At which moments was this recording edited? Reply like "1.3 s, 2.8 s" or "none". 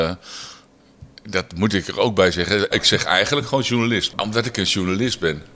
2.7 s